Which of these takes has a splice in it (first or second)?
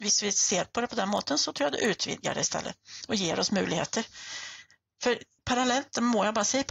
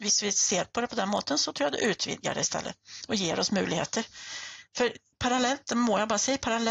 second